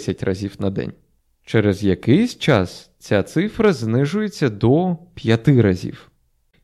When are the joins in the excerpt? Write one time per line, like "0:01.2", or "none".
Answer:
none